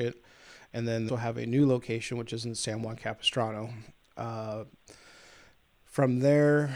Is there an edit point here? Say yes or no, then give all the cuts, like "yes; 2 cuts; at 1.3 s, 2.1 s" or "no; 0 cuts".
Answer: yes; 1 cut; at 1.1 s